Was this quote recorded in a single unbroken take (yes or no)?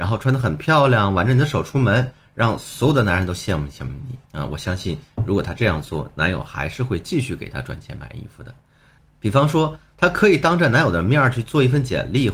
no